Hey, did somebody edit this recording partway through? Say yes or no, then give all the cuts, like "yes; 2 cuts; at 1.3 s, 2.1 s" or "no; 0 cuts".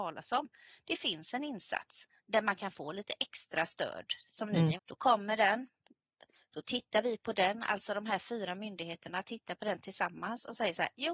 yes; 2 cuts; at 2.2 s, 4.8 s